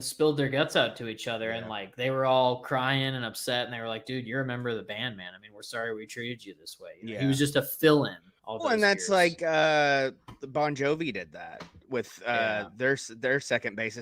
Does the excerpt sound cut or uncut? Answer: uncut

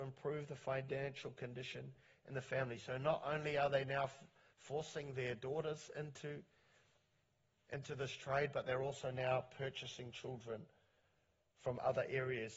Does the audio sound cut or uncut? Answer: uncut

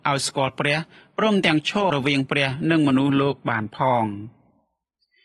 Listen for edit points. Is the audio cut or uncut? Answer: cut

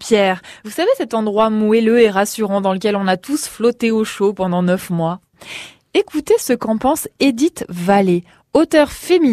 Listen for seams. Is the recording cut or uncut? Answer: uncut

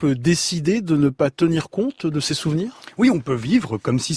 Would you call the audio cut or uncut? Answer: uncut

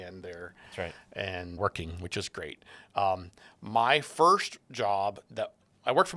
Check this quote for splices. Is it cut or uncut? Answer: cut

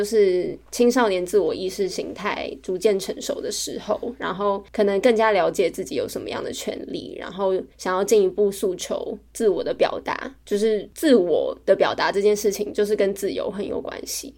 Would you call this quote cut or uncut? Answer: uncut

